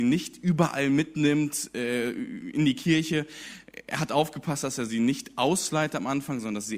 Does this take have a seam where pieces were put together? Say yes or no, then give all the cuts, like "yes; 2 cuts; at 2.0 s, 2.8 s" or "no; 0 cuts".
no; 0 cuts